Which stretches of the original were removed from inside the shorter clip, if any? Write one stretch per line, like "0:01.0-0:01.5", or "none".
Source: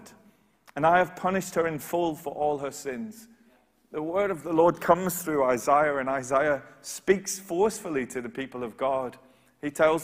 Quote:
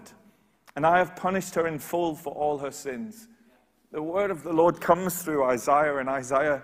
none